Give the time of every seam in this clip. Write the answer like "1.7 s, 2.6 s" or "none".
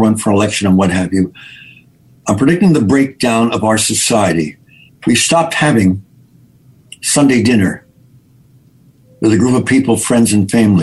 4.9 s